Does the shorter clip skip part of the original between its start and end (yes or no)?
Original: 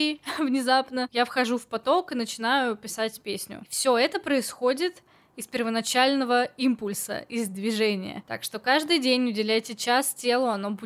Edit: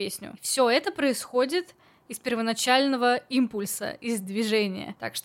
no